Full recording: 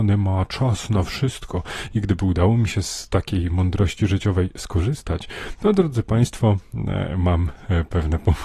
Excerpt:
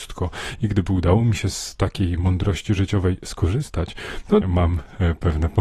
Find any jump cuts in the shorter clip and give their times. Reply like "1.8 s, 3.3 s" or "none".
4.4 s